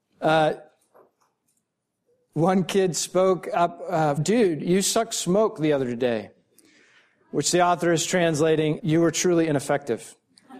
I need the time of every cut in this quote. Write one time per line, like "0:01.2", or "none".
0:04.2
0:08.8